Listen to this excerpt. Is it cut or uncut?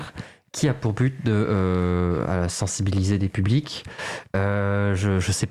uncut